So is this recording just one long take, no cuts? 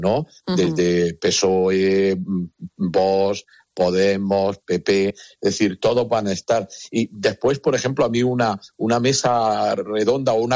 yes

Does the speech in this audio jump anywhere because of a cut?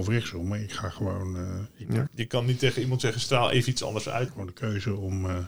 yes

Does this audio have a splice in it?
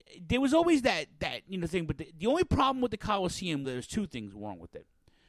yes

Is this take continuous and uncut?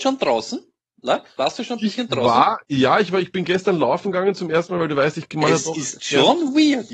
yes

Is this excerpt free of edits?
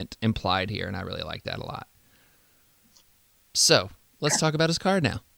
yes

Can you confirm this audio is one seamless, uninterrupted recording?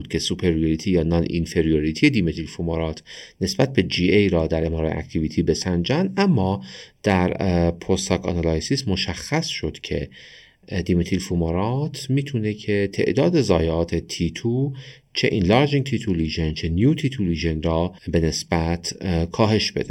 no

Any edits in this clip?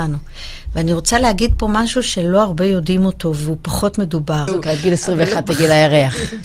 yes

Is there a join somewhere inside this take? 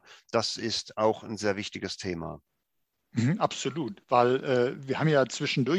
no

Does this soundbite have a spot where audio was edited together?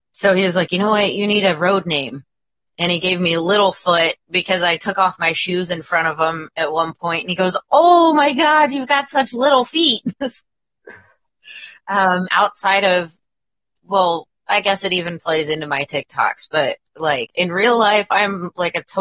yes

